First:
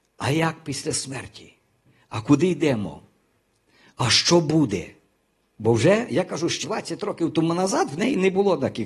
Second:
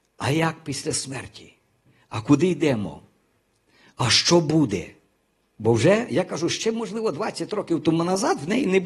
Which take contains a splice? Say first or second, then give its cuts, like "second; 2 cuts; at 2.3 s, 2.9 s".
first; 1 cut; at 6.6 s